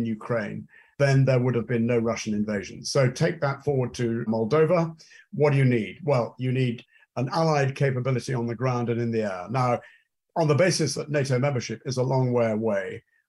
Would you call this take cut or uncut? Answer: cut